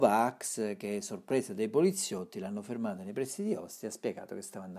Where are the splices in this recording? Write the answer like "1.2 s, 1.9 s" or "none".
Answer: none